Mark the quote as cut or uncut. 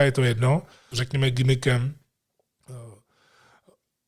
cut